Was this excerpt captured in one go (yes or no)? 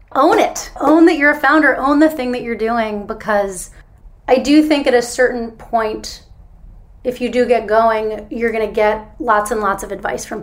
yes